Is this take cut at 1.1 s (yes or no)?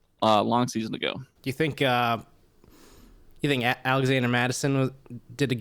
no